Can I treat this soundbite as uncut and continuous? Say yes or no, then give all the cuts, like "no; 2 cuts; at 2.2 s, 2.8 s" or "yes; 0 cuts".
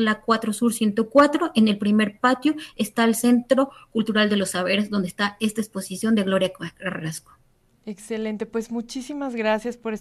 yes; 0 cuts